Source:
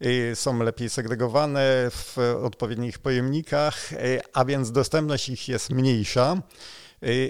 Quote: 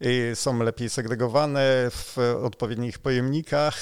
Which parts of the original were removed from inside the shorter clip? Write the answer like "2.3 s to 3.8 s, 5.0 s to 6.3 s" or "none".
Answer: none